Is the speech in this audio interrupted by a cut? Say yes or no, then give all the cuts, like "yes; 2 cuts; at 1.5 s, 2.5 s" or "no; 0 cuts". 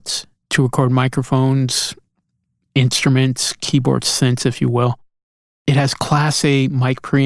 no; 0 cuts